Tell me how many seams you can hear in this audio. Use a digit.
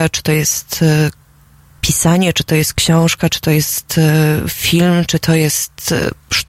0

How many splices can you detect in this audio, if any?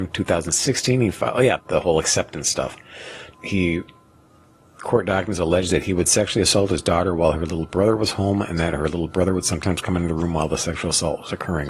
2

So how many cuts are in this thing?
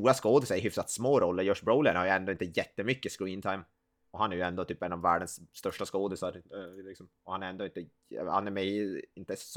0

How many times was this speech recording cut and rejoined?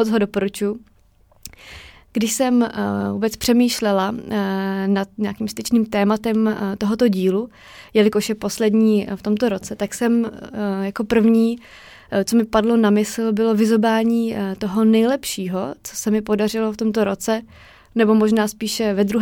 0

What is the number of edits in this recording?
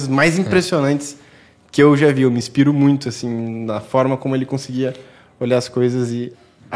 0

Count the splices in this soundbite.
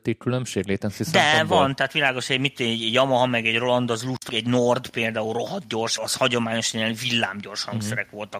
2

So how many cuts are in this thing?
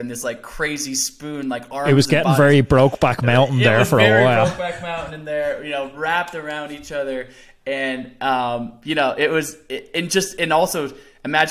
0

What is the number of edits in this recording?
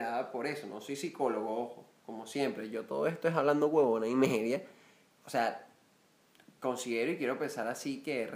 0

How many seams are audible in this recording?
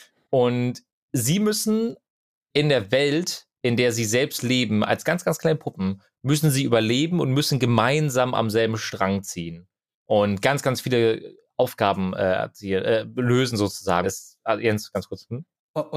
1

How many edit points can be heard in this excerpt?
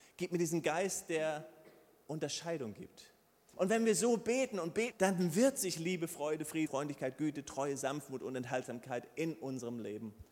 3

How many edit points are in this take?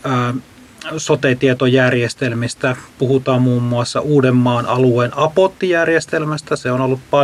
0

